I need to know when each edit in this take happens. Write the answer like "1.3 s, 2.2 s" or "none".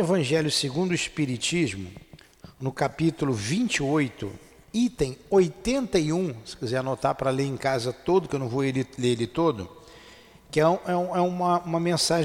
none